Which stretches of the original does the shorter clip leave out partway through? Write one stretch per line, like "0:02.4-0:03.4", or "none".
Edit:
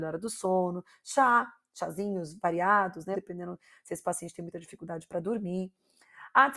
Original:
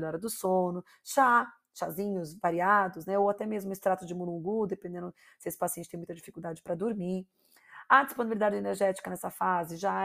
0:03.1-0:04.7